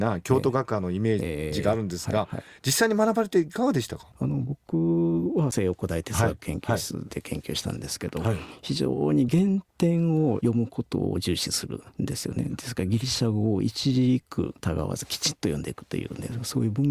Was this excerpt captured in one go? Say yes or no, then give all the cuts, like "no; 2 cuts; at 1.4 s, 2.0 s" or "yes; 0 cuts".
no; 1 cut; at 4.1 s